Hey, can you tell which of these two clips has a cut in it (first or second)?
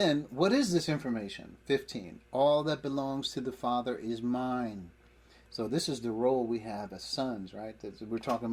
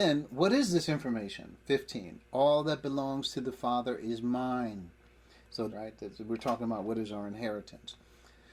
second